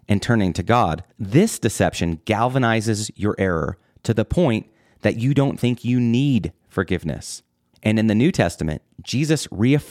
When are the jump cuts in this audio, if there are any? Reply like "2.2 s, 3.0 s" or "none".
1.1 s, 7.7 s